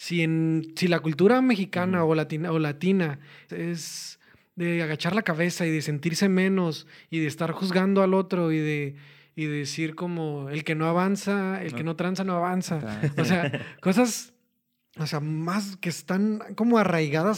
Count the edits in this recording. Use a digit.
1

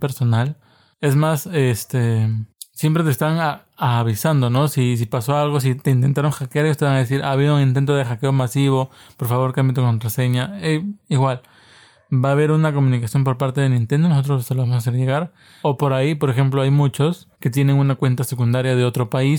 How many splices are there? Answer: 2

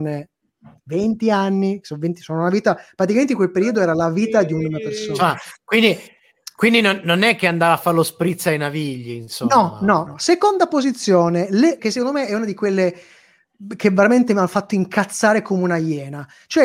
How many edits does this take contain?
2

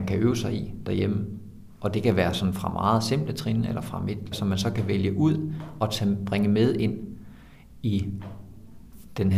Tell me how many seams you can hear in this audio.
1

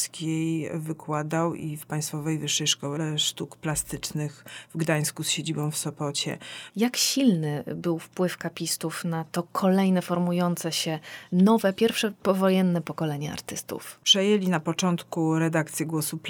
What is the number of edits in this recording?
2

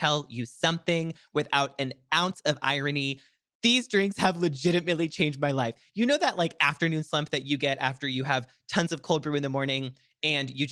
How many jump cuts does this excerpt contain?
0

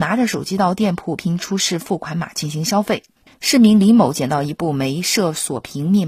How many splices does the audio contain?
1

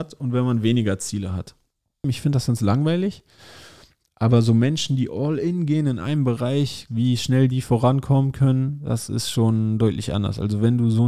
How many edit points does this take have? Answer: 2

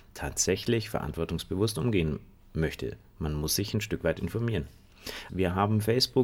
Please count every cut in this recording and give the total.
1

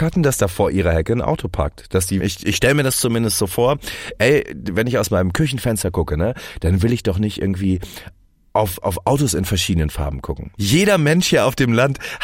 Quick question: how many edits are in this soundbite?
2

